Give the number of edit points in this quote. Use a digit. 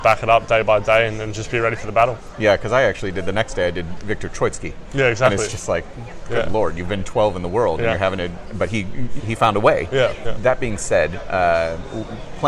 2